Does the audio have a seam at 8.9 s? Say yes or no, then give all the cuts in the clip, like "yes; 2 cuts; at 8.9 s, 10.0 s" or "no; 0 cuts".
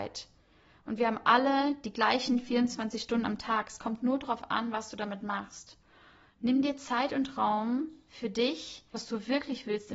yes; 1 cut; at 8.9 s